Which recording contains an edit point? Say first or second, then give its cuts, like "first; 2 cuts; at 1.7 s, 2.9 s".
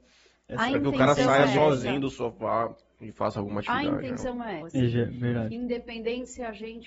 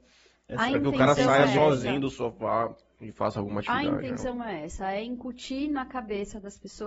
first; 1 cut; at 4.6 s